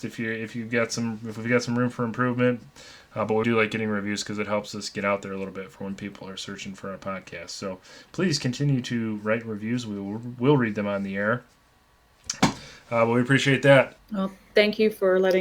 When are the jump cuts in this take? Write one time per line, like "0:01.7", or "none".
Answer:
0:03.4
0:12.4
0:14.0